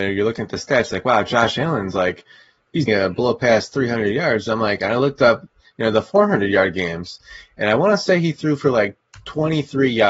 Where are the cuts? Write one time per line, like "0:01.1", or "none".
0:02.9